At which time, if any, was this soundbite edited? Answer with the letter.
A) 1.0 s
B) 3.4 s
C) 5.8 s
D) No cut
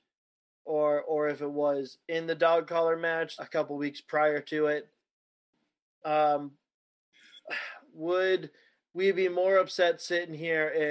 B